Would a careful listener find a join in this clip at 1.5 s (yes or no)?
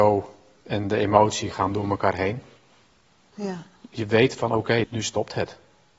no